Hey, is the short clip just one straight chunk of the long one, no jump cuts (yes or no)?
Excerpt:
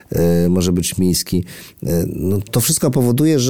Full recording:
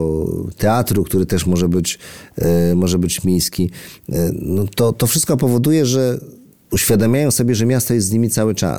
no